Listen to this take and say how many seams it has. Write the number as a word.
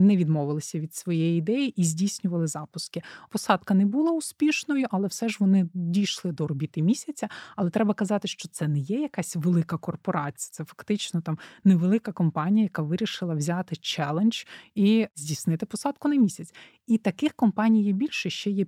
one